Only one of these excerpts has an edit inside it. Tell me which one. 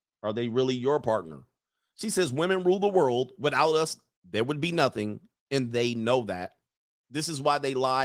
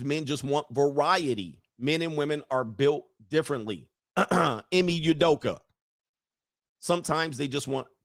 second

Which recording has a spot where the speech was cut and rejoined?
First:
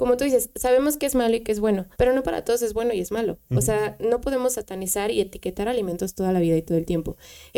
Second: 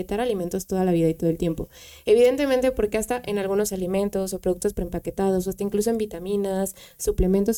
first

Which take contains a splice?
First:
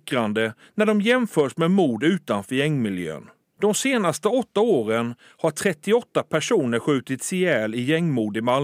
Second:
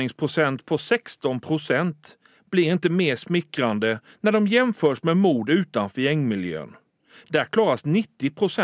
first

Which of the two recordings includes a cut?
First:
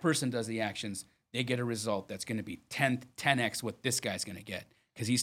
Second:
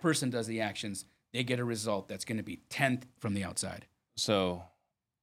second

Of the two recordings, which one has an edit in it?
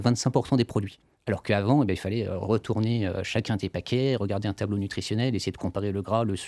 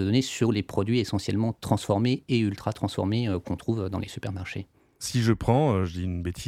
first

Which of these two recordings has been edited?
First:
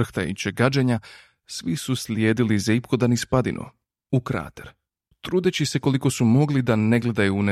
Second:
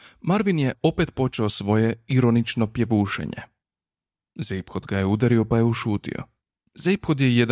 second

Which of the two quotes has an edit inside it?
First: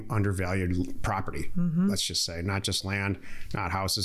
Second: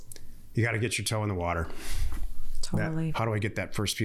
second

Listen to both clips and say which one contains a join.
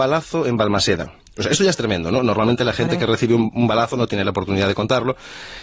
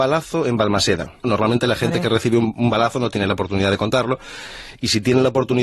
second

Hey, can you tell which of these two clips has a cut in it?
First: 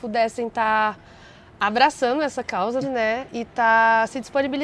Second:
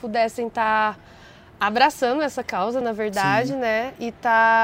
first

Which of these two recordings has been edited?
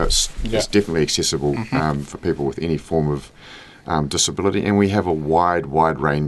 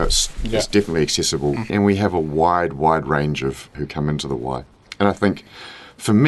second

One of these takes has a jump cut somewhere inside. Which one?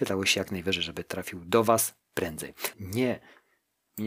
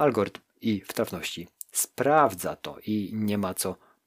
first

